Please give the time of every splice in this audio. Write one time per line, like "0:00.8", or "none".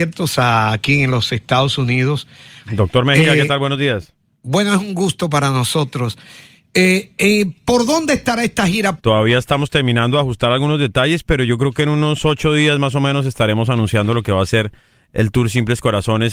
0:02.7
0:09.0